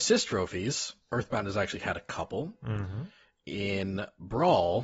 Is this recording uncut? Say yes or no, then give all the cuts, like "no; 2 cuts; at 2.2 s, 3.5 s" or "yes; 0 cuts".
no; 1 cut; at 1.0 s